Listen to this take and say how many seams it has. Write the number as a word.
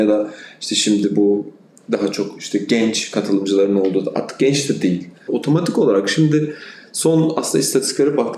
one